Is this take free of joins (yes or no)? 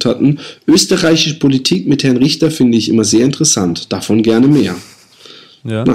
yes